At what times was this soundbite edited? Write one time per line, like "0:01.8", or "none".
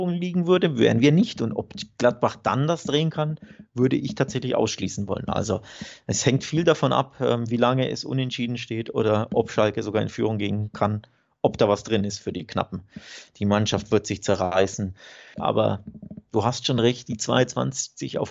0:13.3
0:15.3